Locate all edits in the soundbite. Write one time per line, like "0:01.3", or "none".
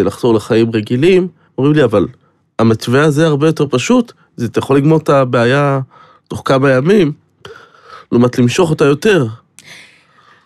0:01.5